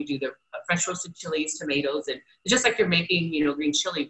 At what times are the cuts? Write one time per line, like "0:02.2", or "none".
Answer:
none